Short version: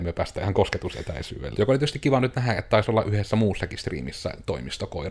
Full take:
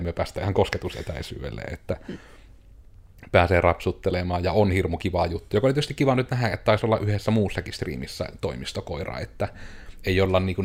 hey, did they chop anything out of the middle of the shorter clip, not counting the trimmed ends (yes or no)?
yes